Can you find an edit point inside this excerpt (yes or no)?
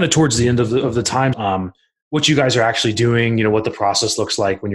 yes